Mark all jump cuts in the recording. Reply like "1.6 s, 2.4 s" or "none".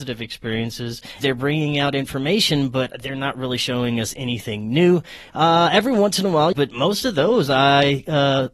1.2 s, 5.3 s, 6.5 s